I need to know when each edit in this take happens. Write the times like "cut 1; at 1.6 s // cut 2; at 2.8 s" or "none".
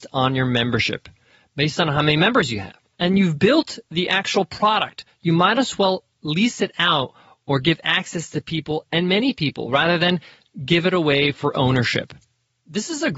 none